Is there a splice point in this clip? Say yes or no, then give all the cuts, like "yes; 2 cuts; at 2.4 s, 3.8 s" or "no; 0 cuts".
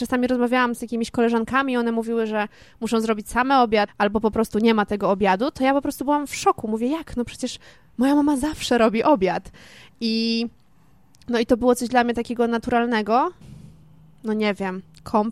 yes; 2 cuts; at 3.9 s, 13.4 s